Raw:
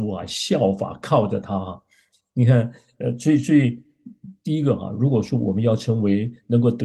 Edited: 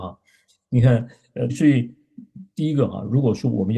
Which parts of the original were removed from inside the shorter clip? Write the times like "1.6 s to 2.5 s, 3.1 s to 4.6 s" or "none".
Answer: 3.1 s to 3.4 s